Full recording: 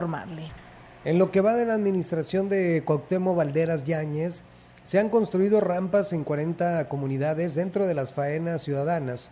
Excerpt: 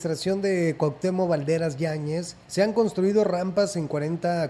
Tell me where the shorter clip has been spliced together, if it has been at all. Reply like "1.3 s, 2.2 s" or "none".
2.4 s